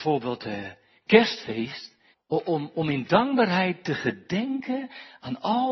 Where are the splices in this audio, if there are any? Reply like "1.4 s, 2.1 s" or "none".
2.1 s